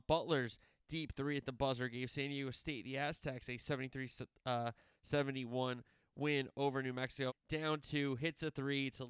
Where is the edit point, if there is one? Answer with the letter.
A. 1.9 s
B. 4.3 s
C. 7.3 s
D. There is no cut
C